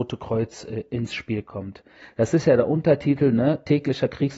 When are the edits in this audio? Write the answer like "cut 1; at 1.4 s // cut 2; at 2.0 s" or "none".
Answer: cut 1; at 2.0 s